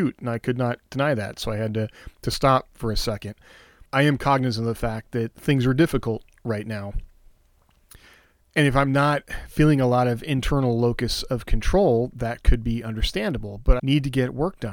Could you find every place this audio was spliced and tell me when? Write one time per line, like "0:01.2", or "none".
0:03.9
0:13.8